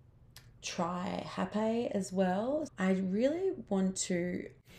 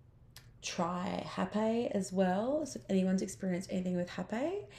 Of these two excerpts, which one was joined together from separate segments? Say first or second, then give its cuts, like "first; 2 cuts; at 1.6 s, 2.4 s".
first; 1 cut; at 2.7 s